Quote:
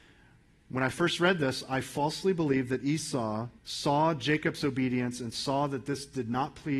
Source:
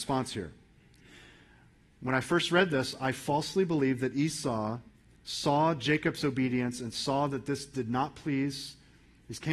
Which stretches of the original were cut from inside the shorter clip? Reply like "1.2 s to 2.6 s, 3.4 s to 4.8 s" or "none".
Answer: 4.9 s to 5.2 s